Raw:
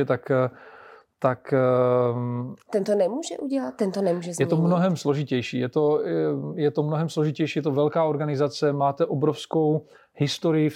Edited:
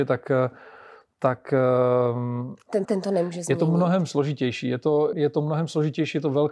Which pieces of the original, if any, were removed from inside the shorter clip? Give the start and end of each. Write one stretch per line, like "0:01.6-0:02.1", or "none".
0:02.9-0:03.8
0:06.0-0:06.5